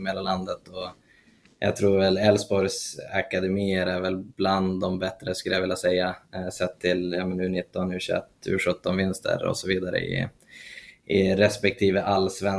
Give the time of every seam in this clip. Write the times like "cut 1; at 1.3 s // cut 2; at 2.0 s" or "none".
none